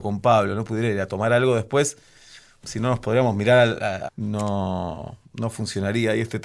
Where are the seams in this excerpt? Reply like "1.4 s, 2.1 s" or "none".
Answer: 4.1 s

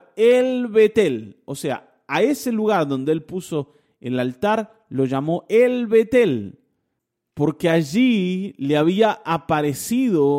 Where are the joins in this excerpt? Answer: none

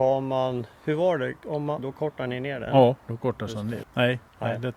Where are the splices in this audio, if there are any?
1.8 s, 3.8 s

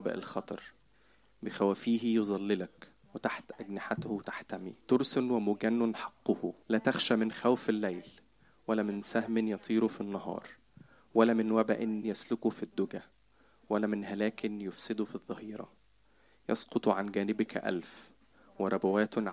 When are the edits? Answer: 4.8 s, 6.6 s

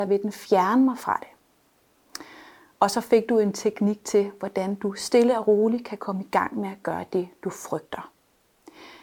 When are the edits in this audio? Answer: none

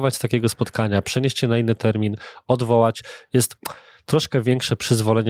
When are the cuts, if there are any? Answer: none

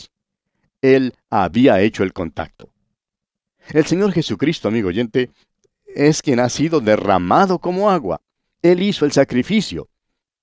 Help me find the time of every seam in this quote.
none

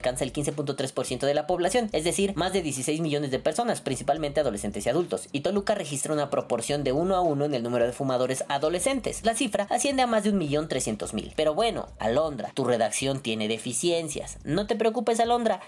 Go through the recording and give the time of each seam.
9.2 s, 11.3 s

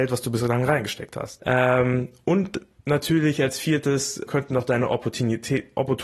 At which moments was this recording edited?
1.4 s, 4.3 s

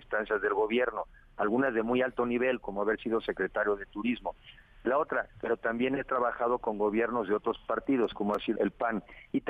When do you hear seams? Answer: 5.3 s, 8.6 s

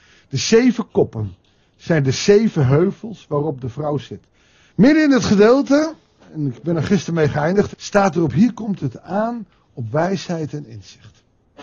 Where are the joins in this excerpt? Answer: 4.7 s, 7.7 s

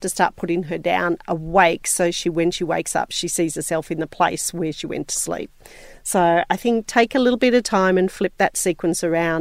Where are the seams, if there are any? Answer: none

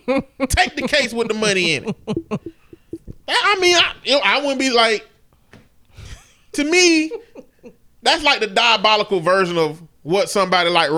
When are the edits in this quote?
none

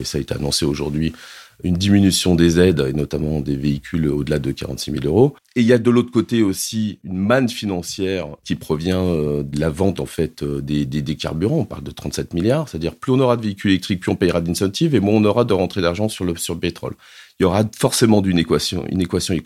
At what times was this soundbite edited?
none

